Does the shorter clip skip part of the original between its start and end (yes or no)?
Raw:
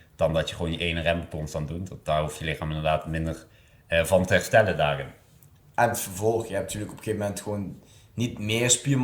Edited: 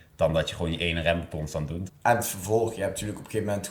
yes